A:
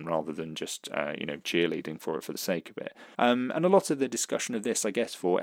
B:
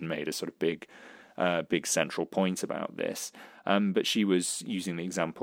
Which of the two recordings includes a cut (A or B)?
A